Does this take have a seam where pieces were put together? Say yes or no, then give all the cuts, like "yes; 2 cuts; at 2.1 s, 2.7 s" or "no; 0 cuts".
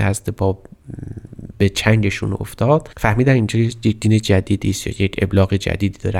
no; 0 cuts